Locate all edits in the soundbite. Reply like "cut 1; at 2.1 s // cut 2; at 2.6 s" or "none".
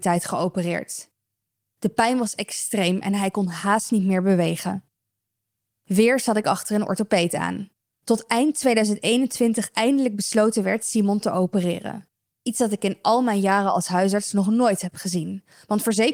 cut 1; at 12.3 s